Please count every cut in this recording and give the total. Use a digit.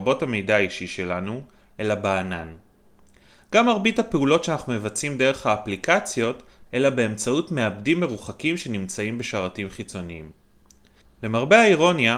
3